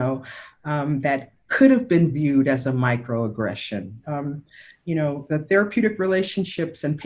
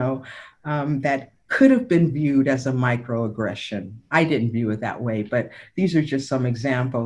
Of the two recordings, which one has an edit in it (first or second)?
first